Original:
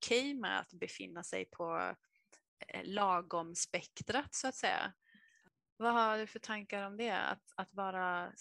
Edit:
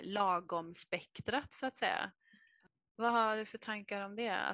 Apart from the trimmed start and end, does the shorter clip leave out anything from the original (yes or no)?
no